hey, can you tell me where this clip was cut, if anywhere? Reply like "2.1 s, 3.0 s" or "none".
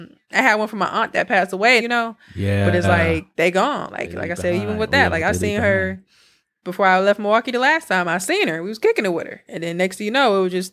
1.8 s